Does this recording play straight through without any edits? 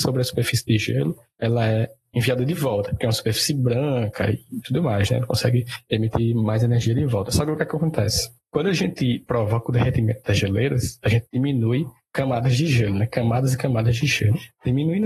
yes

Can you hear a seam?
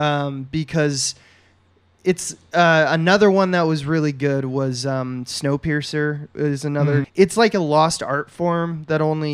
yes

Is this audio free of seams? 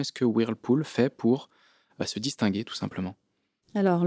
yes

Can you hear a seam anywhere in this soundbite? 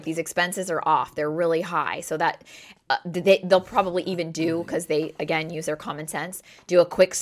no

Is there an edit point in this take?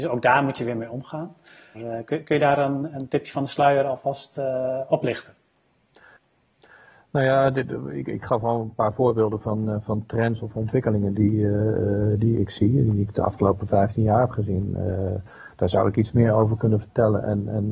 yes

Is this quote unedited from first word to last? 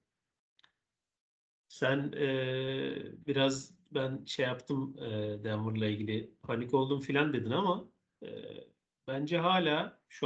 yes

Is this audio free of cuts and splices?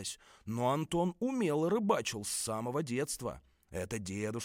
yes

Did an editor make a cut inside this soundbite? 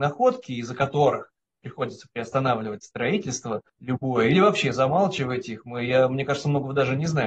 yes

